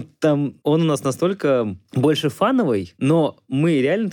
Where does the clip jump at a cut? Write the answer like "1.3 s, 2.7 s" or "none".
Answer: none